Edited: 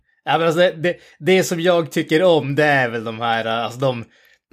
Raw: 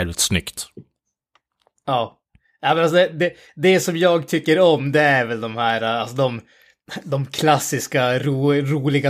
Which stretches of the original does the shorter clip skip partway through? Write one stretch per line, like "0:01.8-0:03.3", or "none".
none